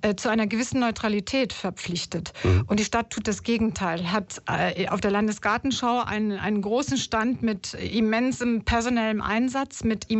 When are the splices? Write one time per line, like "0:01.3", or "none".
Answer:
none